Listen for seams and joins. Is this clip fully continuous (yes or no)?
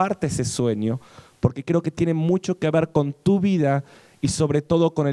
yes